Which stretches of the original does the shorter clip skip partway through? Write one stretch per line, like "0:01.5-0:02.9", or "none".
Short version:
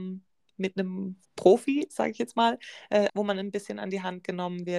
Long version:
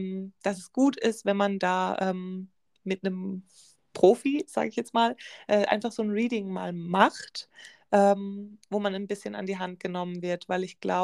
0:03.5-0:03.8
0:05.7-0:08.6